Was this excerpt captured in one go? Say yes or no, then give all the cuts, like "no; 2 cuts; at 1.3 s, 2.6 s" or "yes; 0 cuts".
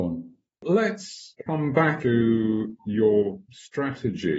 no; 1 cut; at 2.0 s